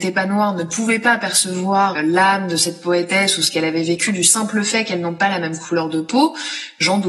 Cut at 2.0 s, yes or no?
yes